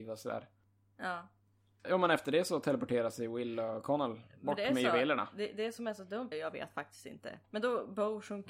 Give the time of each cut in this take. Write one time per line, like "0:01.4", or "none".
0:01.8
0:06.3
0:07.4